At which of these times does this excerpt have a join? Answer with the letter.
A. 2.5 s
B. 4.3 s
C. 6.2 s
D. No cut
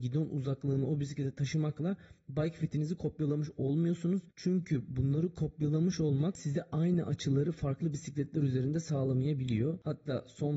B